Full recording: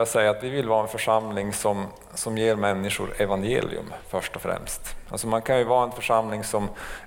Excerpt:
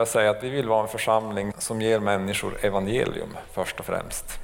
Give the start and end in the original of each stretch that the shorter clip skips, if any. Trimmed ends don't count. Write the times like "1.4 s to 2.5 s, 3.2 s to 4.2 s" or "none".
1.5 s to 2.1 s

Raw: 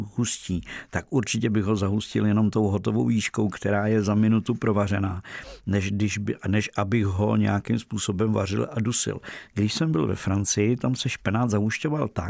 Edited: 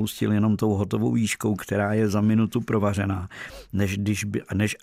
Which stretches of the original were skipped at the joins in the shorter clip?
none

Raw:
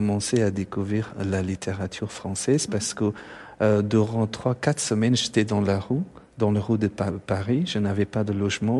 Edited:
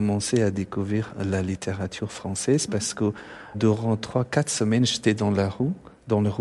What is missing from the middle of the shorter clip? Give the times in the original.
3.5 s to 3.8 s

